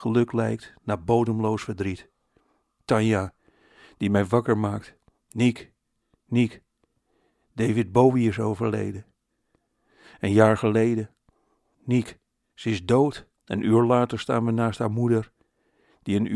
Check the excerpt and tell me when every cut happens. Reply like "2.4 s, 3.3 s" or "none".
11.7 s, 13.4 s